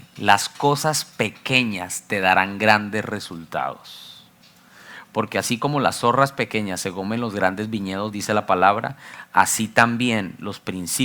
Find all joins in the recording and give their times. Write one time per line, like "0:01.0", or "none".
none